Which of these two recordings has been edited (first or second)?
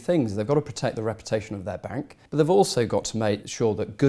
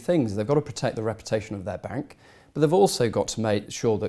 first